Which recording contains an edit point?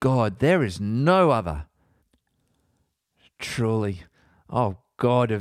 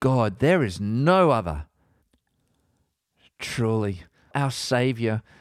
second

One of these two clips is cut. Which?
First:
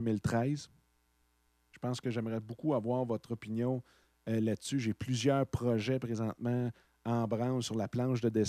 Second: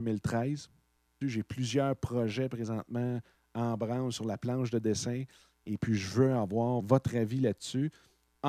second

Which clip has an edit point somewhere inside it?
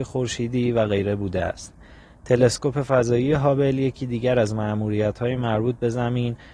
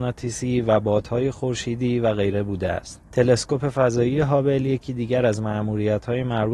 second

